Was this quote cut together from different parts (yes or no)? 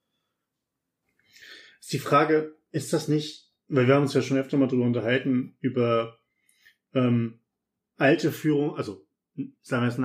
no